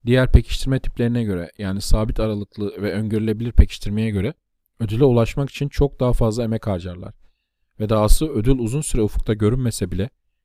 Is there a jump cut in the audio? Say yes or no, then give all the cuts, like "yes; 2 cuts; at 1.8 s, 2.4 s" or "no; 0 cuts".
no; 0 cuts